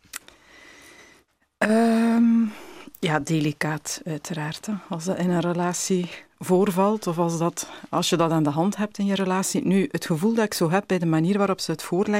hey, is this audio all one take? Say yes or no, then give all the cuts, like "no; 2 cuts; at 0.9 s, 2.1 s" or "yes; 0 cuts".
yes; 0 cuts